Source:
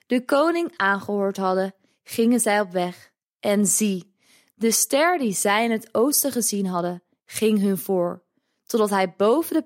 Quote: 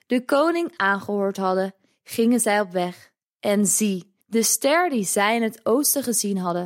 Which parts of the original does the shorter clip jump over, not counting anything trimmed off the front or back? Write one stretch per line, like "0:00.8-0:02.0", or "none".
0:04.2-0:04.5